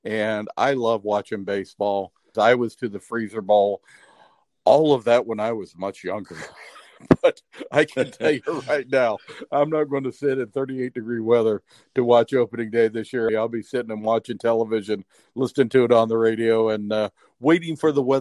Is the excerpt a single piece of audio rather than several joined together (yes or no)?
no